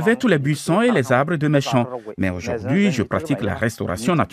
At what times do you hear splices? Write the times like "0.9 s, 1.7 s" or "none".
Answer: none